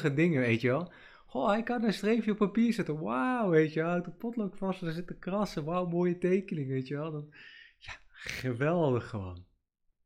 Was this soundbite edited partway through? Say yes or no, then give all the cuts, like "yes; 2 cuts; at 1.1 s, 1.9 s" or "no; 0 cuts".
no; 0 cuts